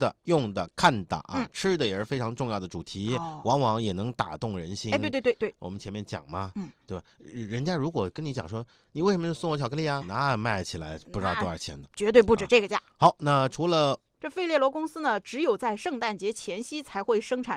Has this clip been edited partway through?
yes; 2 cuts; at 10.0 s, 14.2 s

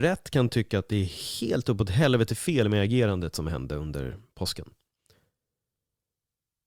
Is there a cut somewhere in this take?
no; 0 cuts

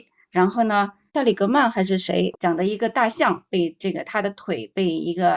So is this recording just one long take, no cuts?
no; 2 cuts; at 1.1 s, 2.3 s

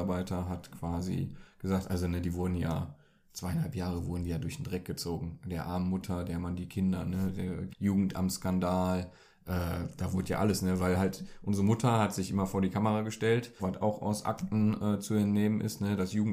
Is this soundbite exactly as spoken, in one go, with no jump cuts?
no; 2 cuts; at 7.7 s, 13.6 s

